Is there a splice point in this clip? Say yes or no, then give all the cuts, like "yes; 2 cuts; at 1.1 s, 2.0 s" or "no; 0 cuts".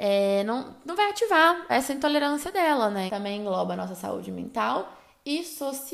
yes; 2 cuts; at 1.7 s, 3.1 s